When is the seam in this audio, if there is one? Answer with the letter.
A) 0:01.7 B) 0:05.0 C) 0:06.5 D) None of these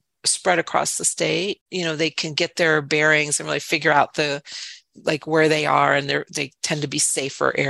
A